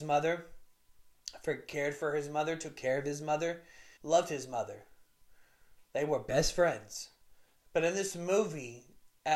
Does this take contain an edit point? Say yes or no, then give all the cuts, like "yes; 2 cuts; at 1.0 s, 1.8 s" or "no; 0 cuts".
yes; 2 cuts; at 4.0 s, 7.6 s